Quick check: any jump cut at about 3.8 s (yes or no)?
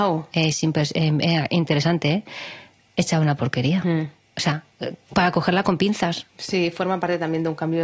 no